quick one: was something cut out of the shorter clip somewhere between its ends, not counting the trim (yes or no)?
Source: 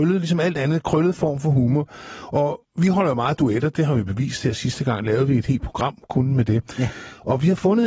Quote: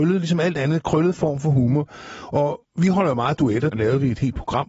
yes